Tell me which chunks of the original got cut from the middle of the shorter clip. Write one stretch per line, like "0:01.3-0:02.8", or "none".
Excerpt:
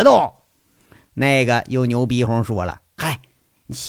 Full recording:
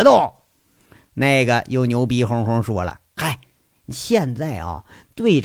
0:02.3-0:02.4

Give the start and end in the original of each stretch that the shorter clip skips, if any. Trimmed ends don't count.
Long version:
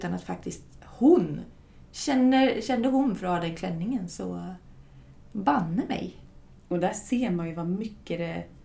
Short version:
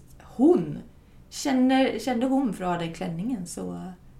none

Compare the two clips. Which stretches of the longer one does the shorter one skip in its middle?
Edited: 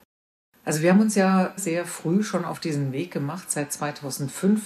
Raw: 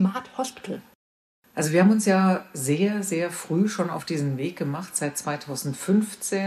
0:02.5-0:03.0

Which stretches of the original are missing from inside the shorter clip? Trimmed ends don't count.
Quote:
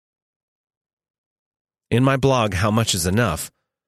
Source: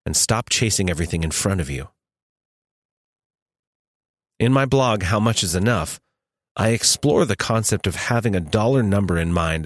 none

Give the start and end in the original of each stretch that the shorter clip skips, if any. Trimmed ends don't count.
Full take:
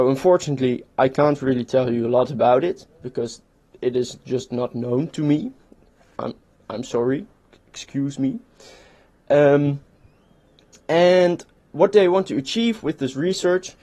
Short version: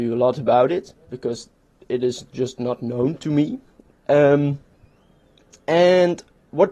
0:05.8-0:09.1

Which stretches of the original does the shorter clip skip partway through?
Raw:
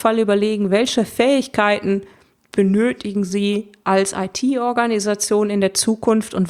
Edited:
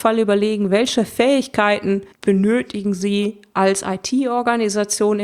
0:02.1-0:02.4

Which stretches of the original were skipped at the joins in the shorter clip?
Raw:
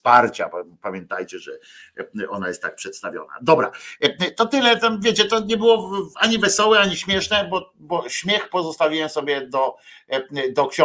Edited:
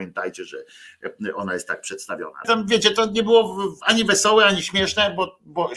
0:03.4-0:04.8

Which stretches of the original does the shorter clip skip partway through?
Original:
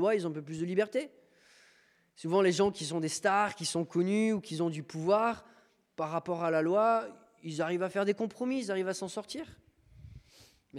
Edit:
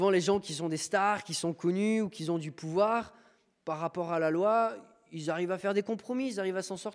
none

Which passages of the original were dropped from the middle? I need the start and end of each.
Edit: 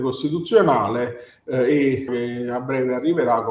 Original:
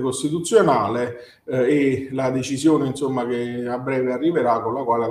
0:02.1-0:03.3

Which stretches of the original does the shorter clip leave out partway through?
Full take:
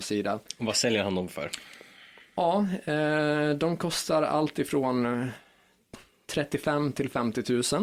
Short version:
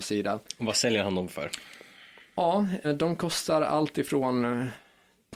0:02.8-0:03.4

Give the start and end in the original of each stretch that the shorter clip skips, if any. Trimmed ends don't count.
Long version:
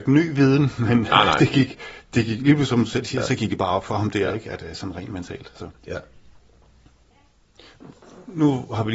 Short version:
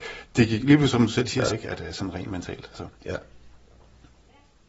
0:03.3-0:04.3

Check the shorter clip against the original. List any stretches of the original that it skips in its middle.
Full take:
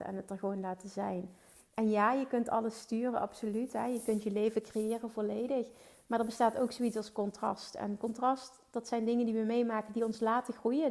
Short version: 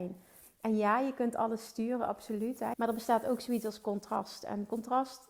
0:03.9-0:06.0

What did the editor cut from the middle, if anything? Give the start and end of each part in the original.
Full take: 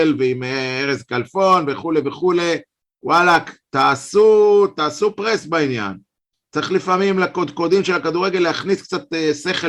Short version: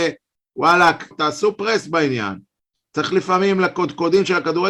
0:03.6-0:04.7

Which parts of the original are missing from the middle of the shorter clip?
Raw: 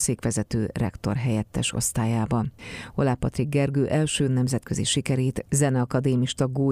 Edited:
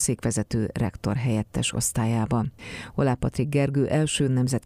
none

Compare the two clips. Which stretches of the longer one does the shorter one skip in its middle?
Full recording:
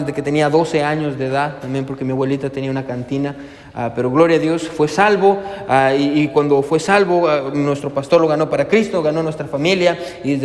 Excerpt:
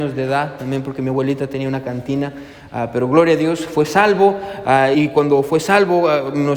0:06.0-0:06.1

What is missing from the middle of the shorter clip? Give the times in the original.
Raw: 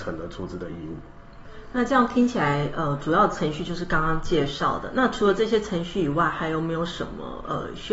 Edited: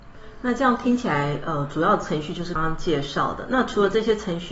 0:03.9-0:04.0

